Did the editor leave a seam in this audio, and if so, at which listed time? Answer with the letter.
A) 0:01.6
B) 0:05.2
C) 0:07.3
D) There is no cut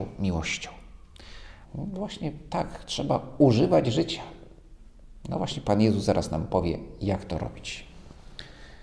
A